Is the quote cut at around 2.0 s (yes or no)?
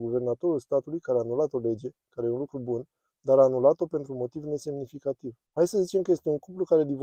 no